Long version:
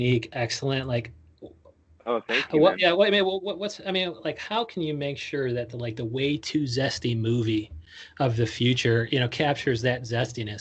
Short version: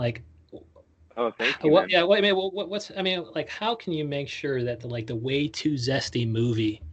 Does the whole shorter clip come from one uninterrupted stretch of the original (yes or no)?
yes